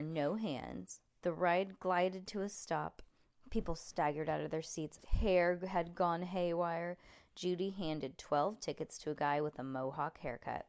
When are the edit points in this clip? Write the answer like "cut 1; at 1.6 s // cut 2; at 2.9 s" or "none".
cut 1; at 1.1 s // cut 2; at 5.0 s